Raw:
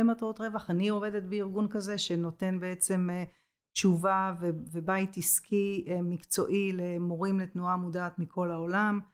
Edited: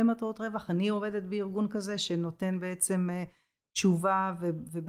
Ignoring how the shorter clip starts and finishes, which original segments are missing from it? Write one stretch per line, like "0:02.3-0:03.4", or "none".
none

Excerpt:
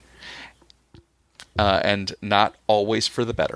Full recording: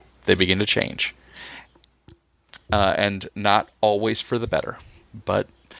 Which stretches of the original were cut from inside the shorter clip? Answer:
none

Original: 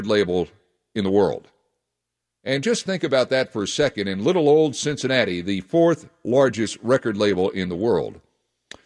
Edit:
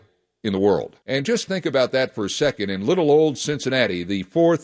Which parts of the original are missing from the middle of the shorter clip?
0:01.5-0:02.4

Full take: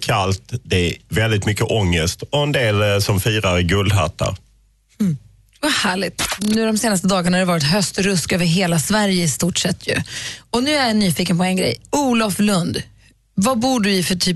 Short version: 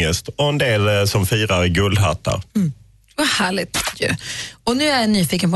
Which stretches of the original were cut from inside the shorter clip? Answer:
0:04.4-0:04.9
0:06.4-0:09.8

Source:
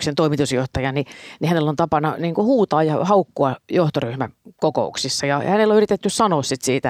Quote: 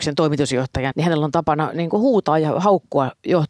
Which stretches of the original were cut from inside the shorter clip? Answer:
0:00.9-0:01.4

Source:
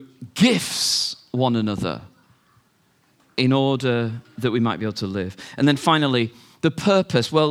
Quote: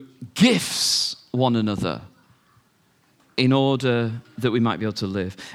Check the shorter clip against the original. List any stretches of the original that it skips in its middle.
none

